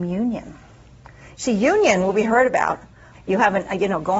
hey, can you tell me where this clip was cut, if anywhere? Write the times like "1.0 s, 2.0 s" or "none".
3.1 s